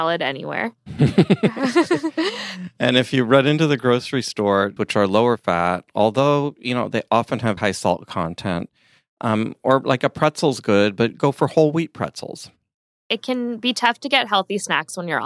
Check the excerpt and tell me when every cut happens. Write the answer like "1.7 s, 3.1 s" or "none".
4.8 s, 7.6 s